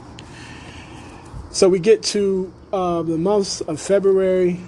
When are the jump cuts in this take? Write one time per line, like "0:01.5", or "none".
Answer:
none